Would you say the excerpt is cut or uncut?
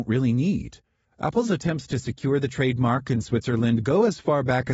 cut